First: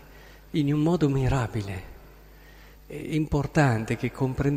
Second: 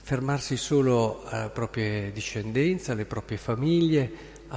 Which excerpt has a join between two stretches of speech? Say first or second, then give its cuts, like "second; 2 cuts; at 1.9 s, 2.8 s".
first; 1 cut; at 2.8 s